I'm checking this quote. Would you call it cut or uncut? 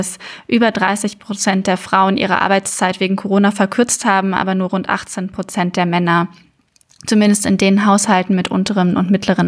uncut